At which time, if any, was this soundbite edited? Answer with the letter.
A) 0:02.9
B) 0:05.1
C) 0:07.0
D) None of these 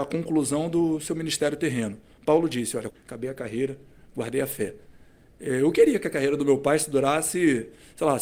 A